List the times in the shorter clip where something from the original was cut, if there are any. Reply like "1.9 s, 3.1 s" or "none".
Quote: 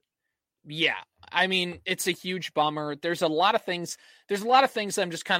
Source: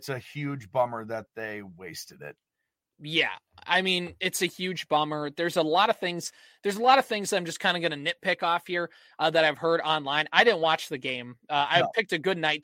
none